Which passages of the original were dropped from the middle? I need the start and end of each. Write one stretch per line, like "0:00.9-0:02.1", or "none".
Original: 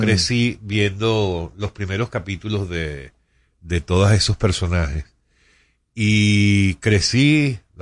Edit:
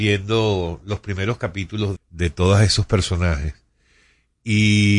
0:02.7-0:03.5